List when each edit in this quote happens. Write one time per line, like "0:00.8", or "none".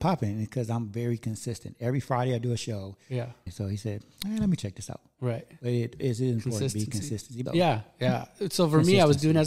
0:03.5
0:07.5